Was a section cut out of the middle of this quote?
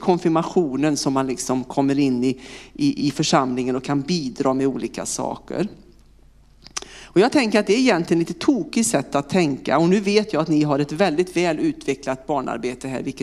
yes; 1 cut; at 3.0 s

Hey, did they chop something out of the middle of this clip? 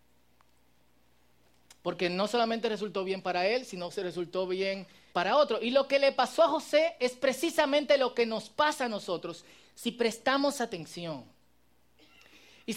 yes; 1 cut; at 5.1 s

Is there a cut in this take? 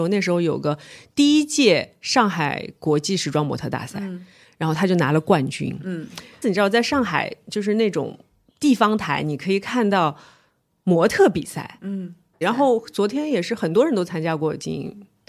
yes; 2 cuts; at 6.4 s, 12.4 s

